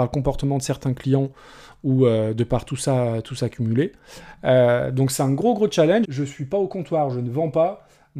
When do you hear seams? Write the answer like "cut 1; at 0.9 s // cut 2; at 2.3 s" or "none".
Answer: cut 1; at 6.0 s